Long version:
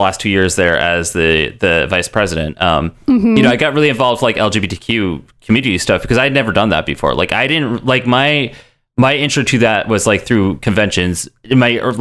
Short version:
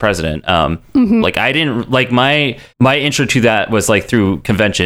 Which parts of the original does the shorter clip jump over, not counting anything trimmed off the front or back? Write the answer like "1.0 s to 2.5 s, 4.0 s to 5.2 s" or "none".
3.3 s to 7.2 s, 8.6 s to 8.9 s